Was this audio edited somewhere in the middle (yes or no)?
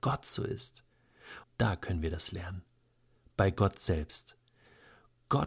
yes